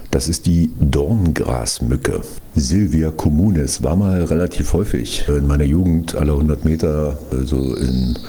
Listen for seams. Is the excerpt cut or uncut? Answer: uncut